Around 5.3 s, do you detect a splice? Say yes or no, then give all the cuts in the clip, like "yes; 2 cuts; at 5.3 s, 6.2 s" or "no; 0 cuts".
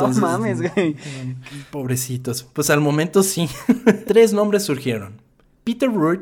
no; 2 cuts; at 1.7 s, 4.0 s